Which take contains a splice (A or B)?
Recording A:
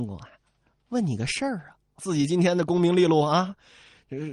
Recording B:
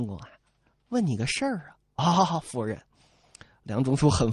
A